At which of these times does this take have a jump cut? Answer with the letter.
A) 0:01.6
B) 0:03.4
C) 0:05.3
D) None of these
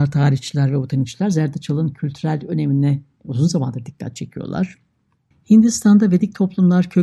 C